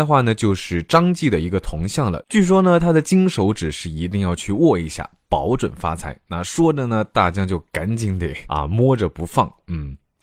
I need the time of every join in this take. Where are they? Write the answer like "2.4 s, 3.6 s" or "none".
none